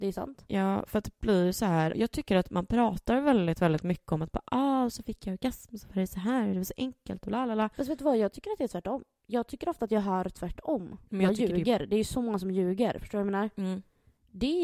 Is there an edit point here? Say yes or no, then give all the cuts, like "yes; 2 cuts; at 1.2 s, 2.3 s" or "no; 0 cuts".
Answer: yes; 2 cuts; at 1.9 s, 11.1 s